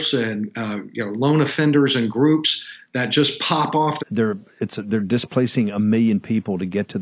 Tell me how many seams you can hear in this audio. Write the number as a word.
one